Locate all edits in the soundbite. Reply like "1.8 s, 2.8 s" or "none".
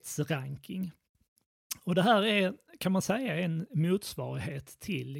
none

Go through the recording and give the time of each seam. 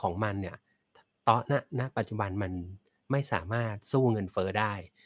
none

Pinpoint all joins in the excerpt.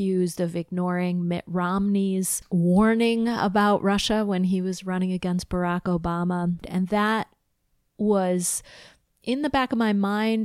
6.6 s

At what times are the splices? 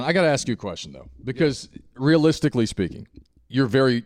none

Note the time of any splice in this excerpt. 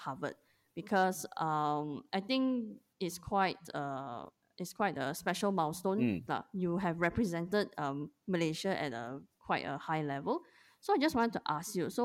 6.3 s

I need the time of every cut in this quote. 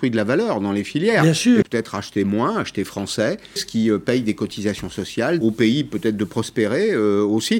1.6 s, 3.6 s, 5.4 s

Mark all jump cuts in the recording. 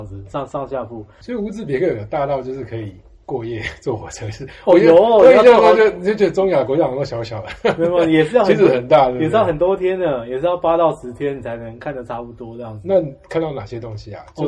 1.2 s

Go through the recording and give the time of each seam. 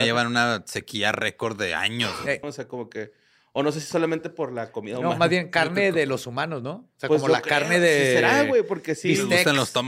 2.4 s

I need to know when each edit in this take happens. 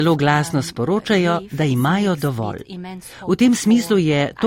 none

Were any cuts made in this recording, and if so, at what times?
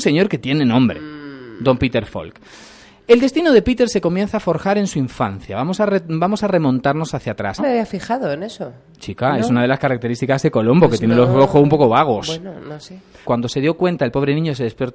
7.6 s, 13.2 s

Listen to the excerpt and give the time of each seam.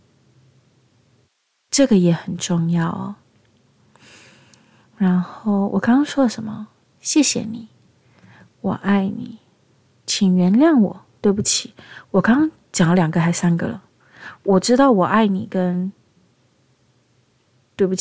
none

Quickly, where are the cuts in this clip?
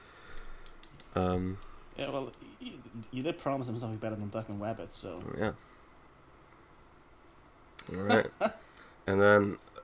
7.8 s

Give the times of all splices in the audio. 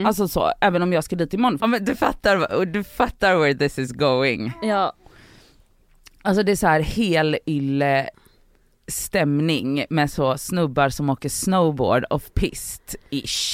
1.6 s

